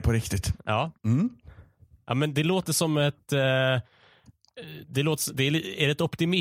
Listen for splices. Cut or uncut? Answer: cut